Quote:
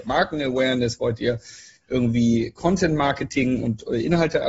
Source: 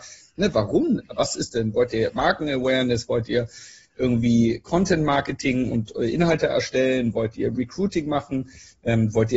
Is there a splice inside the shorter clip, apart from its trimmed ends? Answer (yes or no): no